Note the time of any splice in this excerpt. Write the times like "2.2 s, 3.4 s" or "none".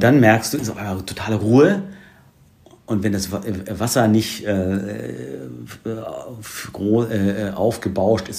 none